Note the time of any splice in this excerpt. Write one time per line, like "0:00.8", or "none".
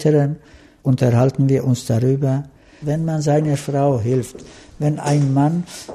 0:02.8